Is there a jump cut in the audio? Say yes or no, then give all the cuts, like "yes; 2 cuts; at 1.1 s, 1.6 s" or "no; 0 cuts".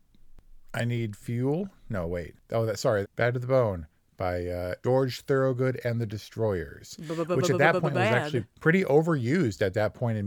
yes; 1 cut; at 3.0 s